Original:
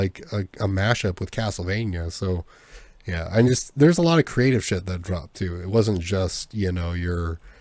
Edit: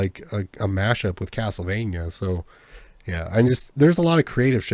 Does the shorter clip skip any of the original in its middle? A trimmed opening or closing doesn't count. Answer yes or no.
no